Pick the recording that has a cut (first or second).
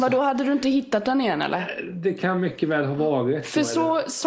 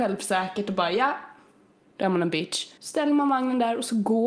second